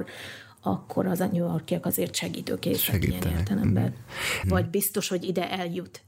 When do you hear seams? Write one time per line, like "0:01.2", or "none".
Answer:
0:04.4